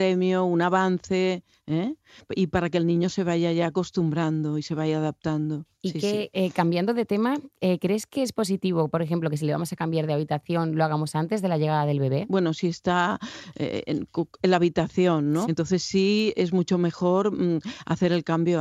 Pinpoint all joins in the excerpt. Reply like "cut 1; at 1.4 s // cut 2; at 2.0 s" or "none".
cut 1; at 6.3 s // cut 2; at 15.4 s